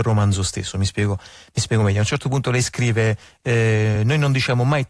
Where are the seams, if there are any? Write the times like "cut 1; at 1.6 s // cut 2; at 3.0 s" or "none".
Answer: none